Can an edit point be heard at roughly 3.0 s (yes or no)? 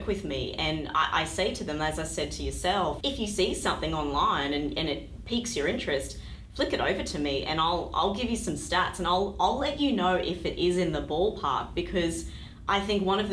yes